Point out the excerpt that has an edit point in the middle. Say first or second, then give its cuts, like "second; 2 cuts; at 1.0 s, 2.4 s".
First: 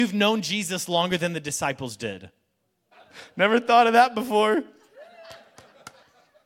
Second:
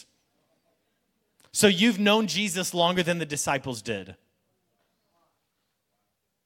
first; 1 cut; at 2.9 s